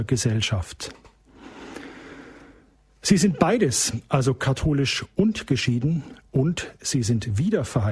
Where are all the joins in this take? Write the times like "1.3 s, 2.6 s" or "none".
none